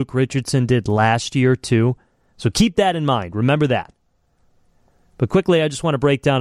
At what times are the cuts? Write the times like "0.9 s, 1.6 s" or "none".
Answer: none